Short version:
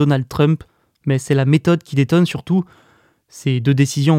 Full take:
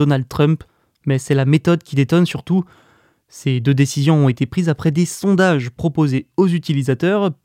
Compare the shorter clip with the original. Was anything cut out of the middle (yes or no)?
no